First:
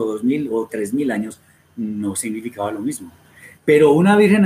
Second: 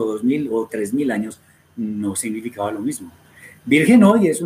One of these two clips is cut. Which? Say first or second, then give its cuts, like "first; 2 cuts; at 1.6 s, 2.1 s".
first; 1 cut; at 3.6 s